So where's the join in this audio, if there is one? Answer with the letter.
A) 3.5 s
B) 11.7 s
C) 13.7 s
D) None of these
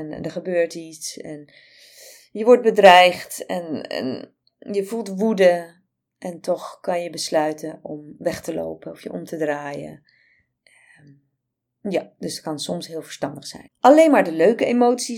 C